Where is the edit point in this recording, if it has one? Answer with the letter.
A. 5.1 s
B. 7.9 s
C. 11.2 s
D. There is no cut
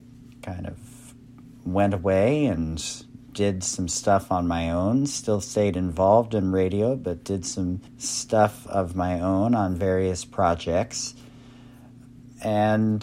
B